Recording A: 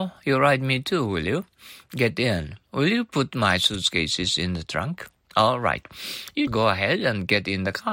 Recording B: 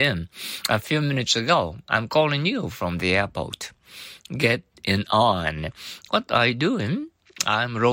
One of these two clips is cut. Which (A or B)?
A